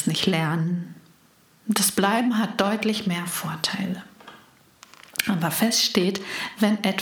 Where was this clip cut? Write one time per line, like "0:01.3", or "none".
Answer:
none